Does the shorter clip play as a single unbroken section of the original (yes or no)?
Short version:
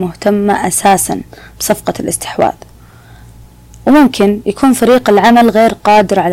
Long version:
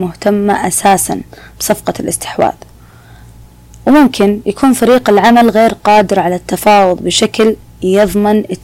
yes